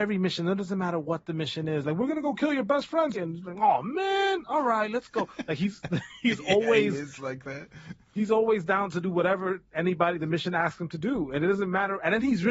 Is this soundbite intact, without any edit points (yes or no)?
no